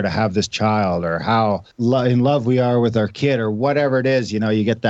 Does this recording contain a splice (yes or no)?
yes